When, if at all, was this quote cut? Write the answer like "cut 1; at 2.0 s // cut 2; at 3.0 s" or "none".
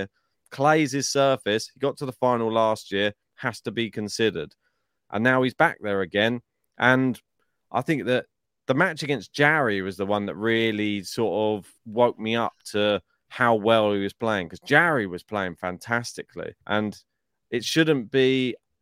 cut 1; at 11.8 s // cut 2; at 16.6 s